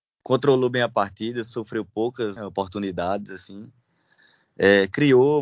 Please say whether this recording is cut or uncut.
cut